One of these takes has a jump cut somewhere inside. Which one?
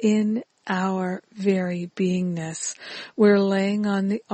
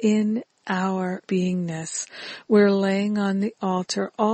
second; 1 cut; at 1.2 s

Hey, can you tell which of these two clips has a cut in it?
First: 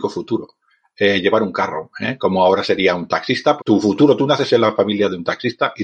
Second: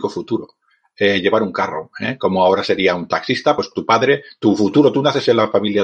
first; 1 cut; at 3.6 s

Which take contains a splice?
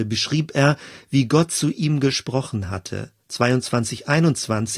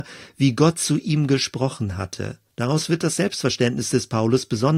second; 1 cut; at 2.5 s

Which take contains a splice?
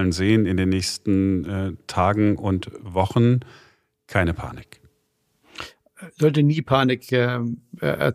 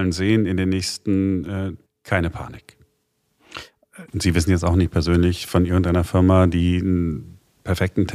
second; 2 cuts; at 1.9 s, 4.1 s

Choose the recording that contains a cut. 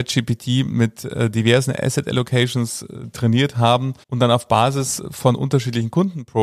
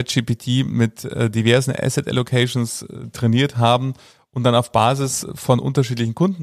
first; 1 cut; at 4.0 s

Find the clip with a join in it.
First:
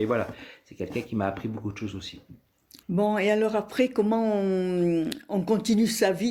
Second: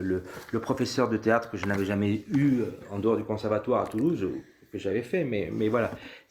first; 1 cut; at 2.8 s

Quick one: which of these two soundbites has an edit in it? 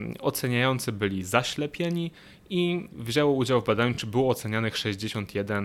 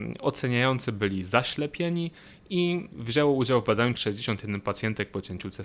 second; 1 cut; at 3.9 s

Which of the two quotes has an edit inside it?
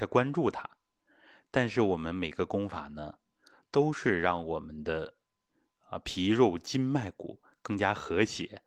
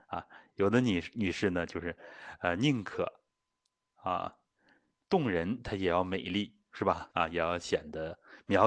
second; 1 cut; at 7.1 s

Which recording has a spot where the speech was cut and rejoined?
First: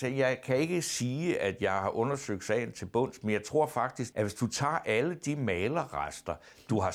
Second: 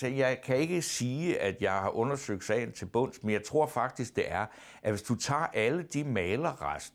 first; 1 cut; at 4.1 s

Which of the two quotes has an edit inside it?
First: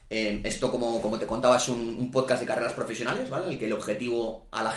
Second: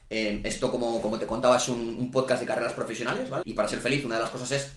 second; 1 cut; at 3.4 s

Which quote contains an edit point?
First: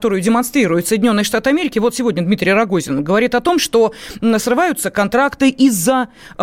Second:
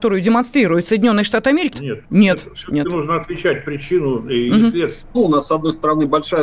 second; 2 cuts; at 1.7 s, 5.1 s

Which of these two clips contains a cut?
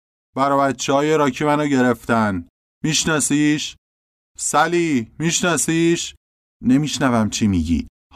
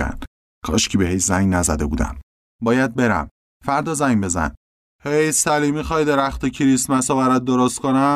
second; 1 cut; at 2.5 s

